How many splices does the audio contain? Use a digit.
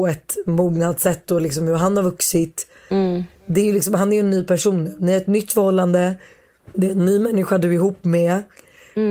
1